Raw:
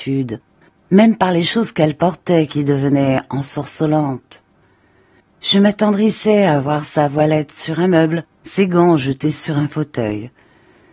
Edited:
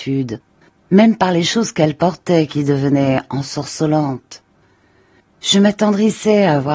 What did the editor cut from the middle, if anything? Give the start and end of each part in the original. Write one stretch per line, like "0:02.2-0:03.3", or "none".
none

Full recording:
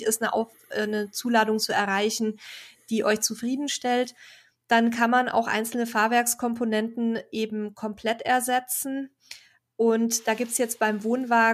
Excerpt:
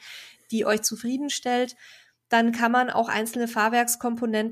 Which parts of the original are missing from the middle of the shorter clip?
none

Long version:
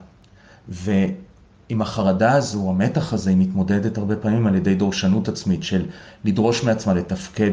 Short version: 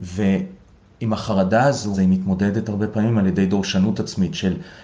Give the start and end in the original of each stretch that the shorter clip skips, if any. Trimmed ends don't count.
0:02.6-0:03.2

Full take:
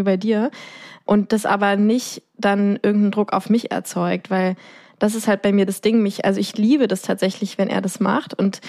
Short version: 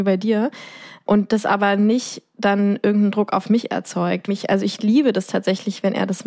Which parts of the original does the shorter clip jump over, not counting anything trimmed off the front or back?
0:04.3-0:06.0

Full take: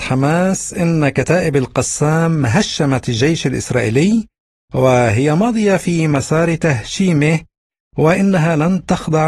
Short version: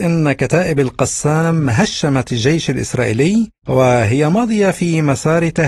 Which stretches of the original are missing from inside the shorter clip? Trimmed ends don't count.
0:04.3-0:04.6

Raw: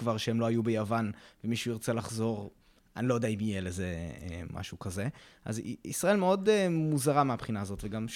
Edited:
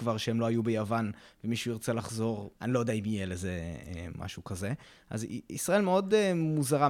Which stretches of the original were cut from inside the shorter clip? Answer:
0:02.5-0:02.9

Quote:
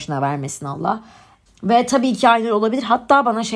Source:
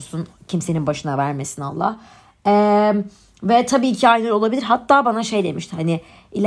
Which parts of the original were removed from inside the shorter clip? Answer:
0:02.4-0:03.3

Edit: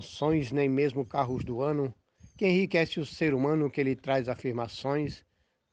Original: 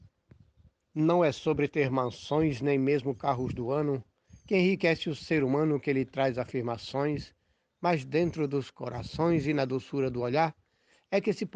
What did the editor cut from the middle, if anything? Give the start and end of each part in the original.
none

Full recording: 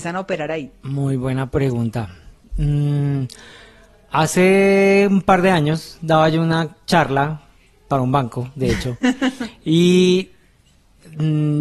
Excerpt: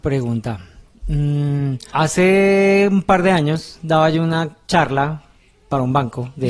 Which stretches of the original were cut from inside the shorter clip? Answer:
0:03.4-0:04.1

